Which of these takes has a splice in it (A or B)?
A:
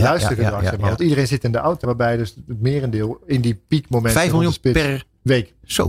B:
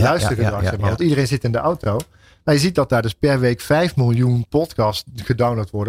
A